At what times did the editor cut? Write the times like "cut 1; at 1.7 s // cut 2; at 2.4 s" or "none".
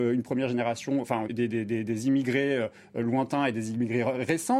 cut 1; at 1.3 s